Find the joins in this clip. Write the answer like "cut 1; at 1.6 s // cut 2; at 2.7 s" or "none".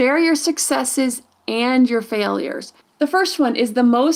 cut 1; at 2.8 s

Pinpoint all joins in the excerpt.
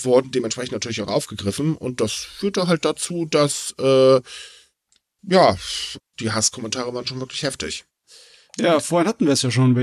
cut 1; at 6.0 s

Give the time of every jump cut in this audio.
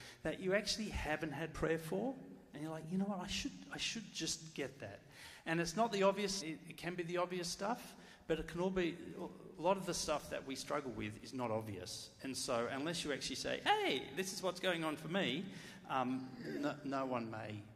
cut 1; at 6.4 s

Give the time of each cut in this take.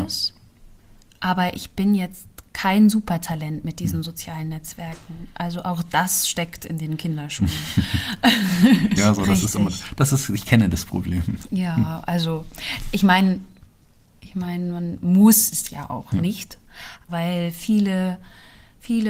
cut 1; at 9.0 s // cut 2; at 17.1 s

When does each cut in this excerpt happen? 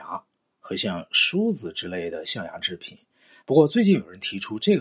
cut 1; at 3.4 s

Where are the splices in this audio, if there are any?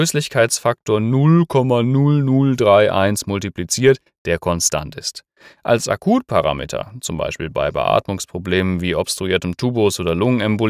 none

